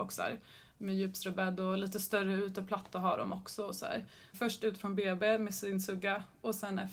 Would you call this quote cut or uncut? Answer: cut